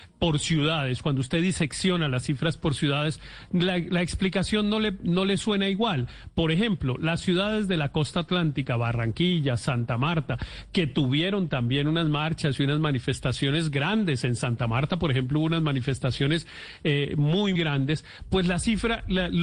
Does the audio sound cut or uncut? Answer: cut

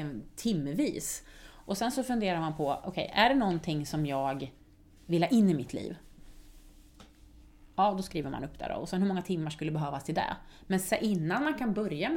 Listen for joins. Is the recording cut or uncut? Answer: uncut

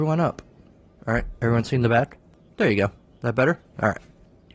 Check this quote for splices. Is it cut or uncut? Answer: cut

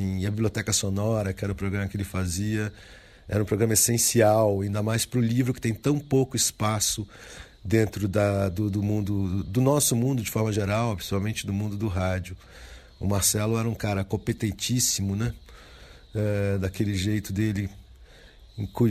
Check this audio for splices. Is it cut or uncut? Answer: uncut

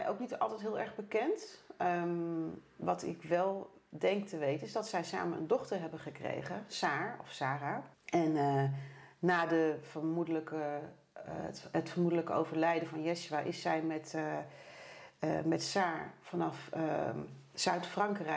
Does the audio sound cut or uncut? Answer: cut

